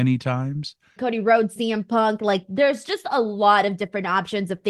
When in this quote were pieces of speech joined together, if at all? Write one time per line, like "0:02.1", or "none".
0:01.0